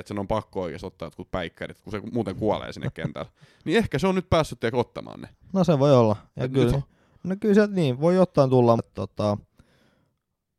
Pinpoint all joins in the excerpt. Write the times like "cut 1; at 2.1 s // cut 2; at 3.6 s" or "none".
cut 1; at 6.7 s // cut 2; at 8.8 s